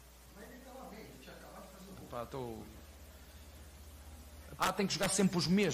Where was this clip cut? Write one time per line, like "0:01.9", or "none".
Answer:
0:02.1
0:04.6

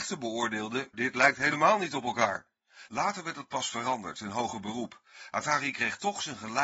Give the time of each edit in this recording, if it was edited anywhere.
0:00.9

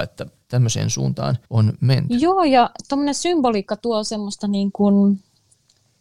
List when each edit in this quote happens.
0:01.5

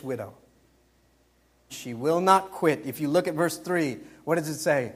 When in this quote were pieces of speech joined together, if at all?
0:01.7

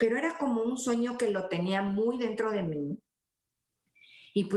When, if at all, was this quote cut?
none

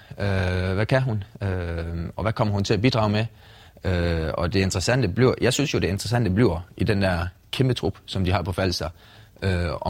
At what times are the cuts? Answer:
none

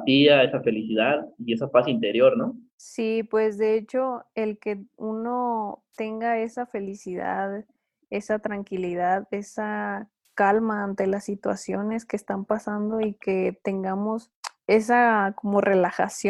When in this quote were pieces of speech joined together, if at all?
none

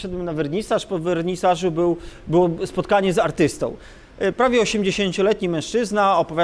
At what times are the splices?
none

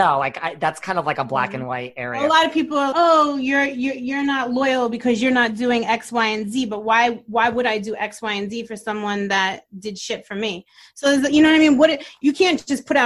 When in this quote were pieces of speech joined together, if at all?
0:02.9

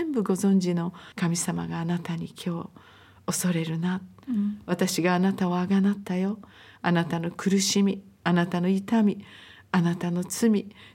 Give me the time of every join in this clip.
0:01.1

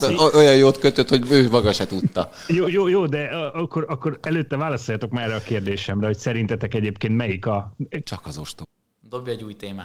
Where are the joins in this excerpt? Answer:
0:08.0

